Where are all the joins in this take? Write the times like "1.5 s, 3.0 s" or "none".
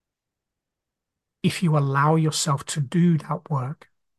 none